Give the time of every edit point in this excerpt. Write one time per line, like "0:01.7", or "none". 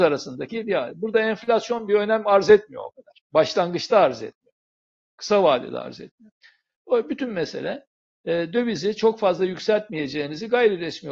none